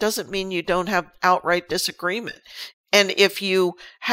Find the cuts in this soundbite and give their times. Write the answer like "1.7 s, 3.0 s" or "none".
2.7 s